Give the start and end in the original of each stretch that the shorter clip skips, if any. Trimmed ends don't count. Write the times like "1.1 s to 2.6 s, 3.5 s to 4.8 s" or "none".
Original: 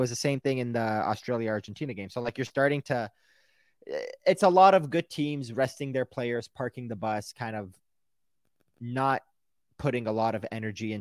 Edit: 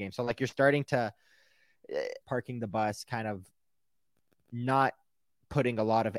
4.2 s to 6.5 s

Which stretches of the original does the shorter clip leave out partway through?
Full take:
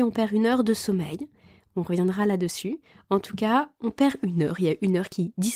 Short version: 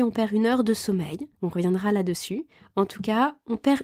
1.3 s to 1.7 s

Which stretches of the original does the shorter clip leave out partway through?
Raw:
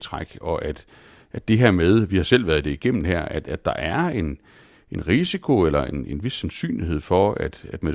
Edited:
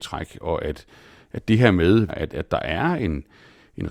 2.1 s to 3.2 s

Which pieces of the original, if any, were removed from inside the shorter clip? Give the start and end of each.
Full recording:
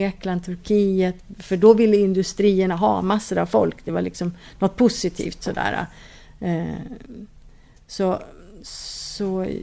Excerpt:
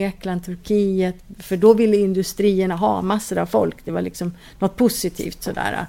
none

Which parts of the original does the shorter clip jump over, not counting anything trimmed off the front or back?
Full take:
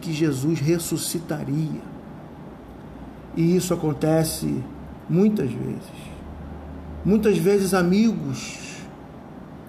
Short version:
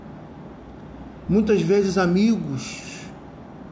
3.3 s to 7.0 s

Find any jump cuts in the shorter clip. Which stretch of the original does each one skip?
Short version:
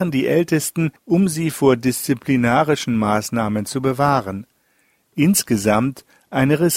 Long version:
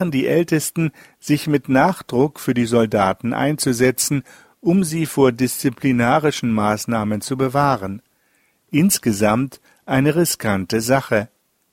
1.0 s to 4.5 s

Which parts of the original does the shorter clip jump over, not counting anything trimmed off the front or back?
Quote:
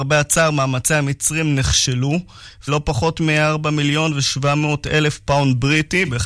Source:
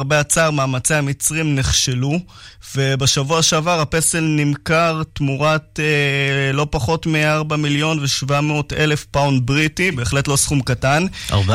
2.7 s to 6.5 s

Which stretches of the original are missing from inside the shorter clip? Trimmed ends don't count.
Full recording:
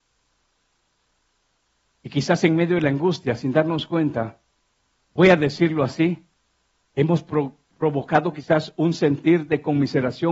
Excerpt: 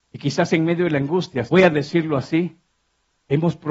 3.4 s to 5.1 s

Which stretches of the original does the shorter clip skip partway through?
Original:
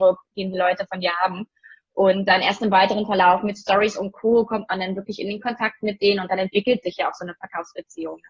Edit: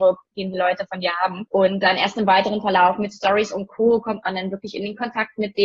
1.5 s to 1.9 s

